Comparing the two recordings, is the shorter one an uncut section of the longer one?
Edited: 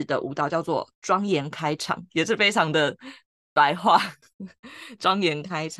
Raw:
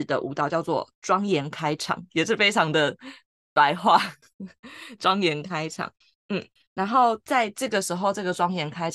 yes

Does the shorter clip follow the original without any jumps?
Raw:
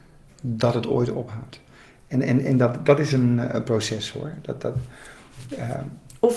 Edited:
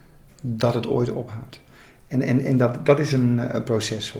yes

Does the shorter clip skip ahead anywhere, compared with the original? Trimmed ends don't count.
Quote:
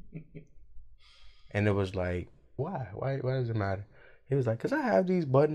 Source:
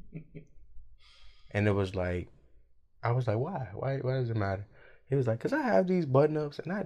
yes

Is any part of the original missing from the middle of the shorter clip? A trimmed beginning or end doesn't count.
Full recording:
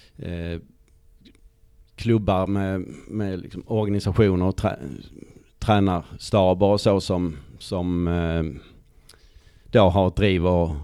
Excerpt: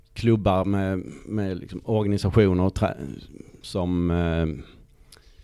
yes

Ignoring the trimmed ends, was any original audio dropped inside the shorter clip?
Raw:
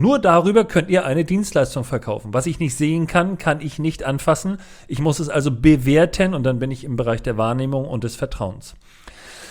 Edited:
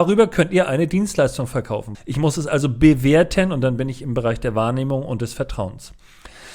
yes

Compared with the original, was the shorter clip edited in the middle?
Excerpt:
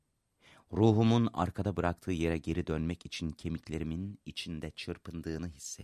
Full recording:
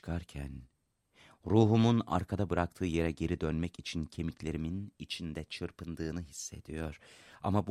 no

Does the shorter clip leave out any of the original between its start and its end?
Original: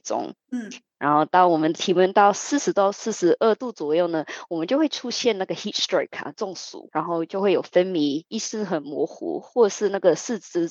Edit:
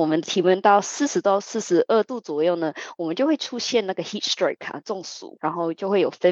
no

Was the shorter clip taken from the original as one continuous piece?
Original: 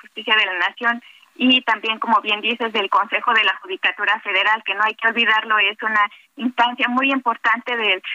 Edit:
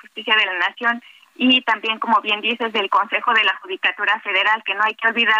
yes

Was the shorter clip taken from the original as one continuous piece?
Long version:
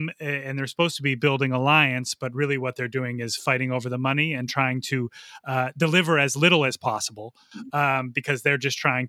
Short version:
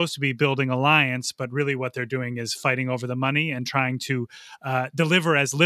yes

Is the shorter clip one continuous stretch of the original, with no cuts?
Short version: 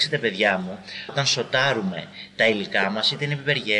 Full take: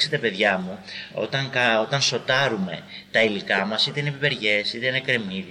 no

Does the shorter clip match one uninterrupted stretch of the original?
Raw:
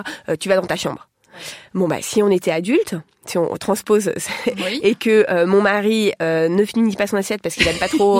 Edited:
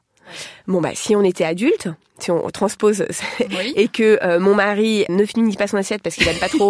no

